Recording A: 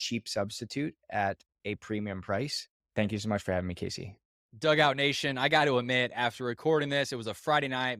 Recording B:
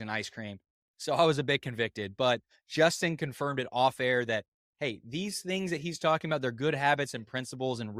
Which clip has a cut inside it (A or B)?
A